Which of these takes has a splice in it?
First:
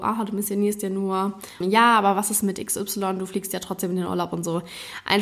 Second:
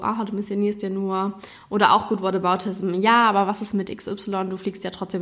first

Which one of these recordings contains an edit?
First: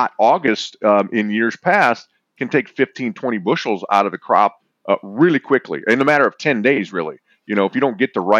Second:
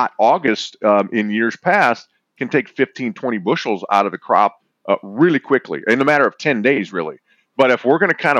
second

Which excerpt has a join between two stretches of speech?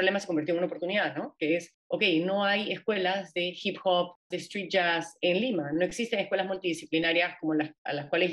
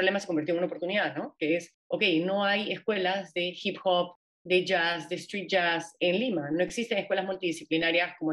first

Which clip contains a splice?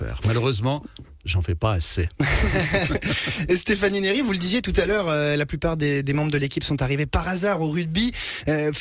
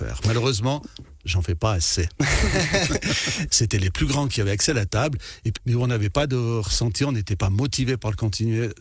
second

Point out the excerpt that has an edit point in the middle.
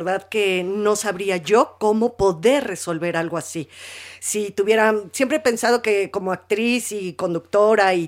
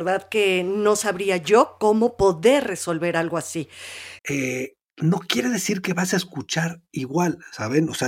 second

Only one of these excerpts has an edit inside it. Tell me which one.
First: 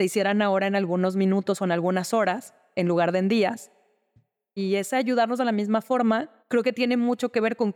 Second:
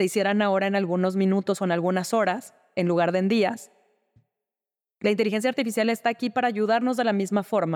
first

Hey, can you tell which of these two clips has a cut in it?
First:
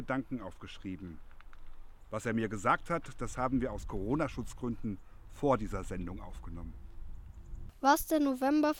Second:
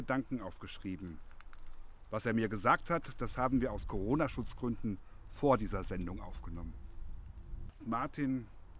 second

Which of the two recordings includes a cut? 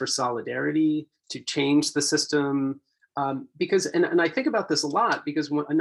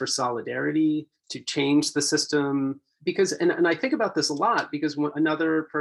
second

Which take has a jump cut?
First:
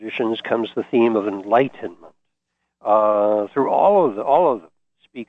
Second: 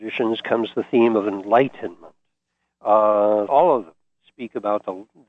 second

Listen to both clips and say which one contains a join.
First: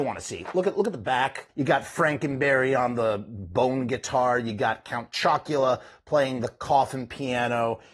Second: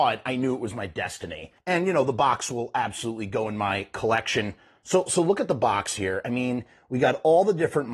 first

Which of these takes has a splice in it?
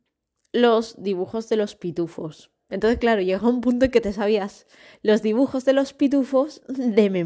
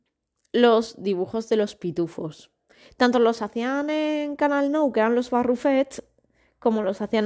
first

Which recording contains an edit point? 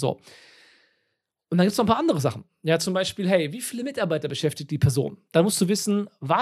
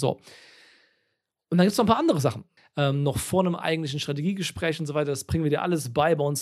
second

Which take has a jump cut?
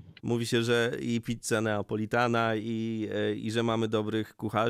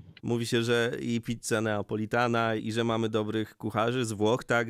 second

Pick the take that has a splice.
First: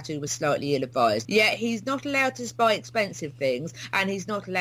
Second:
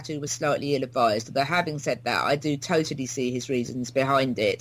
first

